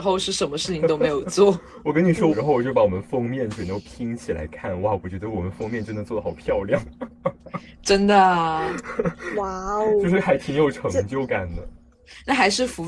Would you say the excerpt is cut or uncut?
cut